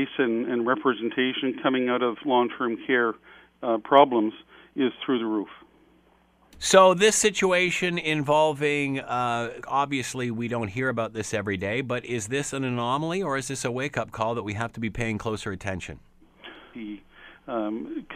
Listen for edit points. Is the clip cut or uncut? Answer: cut